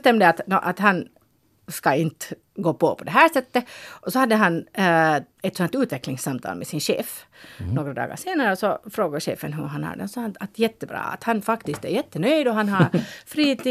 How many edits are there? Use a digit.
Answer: 1